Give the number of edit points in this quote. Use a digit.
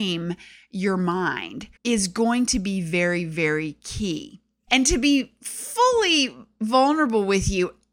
2